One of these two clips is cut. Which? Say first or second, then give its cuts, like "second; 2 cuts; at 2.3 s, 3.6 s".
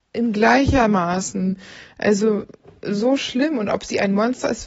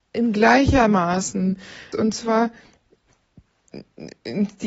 second; 1 cut; at 1.9 s